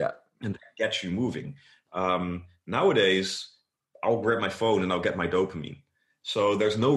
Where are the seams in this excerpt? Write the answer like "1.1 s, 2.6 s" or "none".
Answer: none

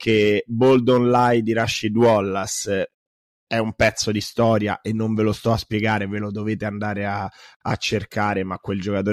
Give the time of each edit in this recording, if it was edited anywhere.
none

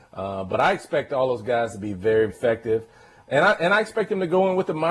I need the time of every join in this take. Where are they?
2.3 s

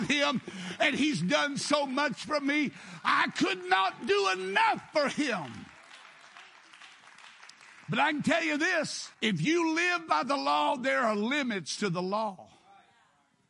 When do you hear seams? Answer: 9.1 s

